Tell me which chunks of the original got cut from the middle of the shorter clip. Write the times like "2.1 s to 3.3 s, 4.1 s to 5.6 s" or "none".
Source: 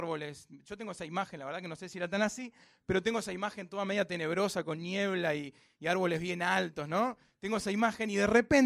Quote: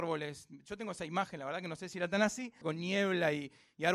2.6 s to 4.6 s